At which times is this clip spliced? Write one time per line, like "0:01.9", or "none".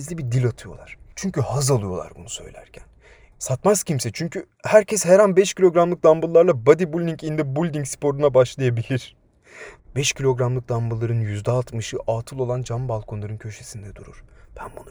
0:03.3
0:09.8